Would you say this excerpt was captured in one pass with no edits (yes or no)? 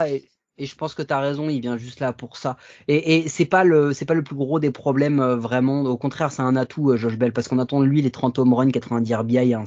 yes